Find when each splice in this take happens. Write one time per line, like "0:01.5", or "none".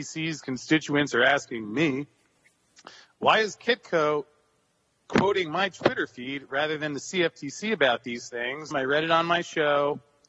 0:08.7